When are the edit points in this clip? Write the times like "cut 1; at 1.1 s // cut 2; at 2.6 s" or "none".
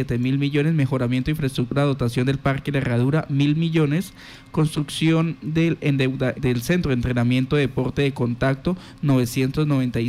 cut 1; at 6.3 s

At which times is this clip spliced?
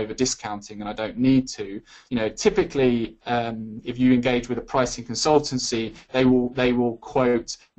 cut 1; at 2.1 s

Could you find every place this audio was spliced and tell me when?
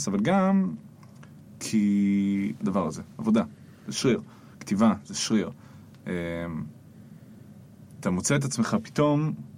cut 1; at 2.6 s

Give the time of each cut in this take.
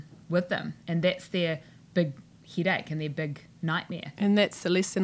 none

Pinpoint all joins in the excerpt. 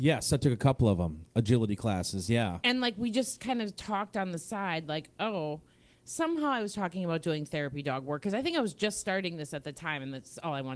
none

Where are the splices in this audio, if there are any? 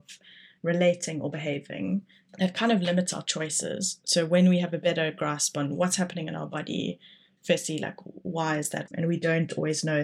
cut 1; at 8.9 s

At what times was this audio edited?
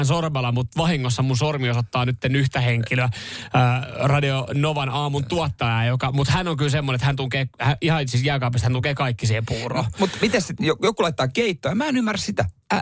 none

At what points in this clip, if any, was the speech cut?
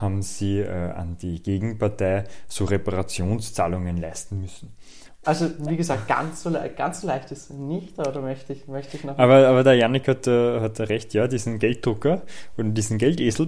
cut 1; at 5.2 s

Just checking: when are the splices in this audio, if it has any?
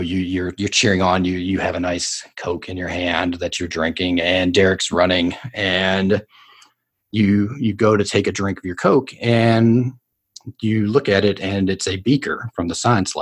none

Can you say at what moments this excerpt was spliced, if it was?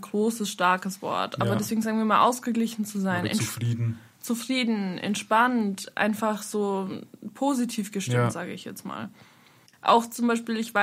none

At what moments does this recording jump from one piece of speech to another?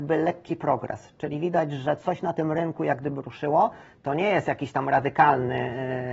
none

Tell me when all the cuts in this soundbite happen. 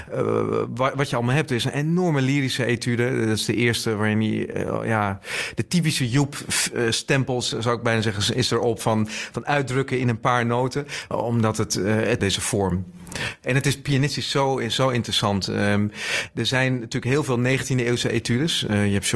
cut 1; at 11.1 s // cut 2; at 12.2 s

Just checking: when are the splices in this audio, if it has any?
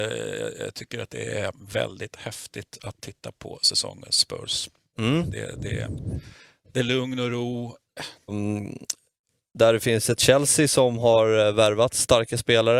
cut 1; at 6.7 s // cut 2; at 8.3 s

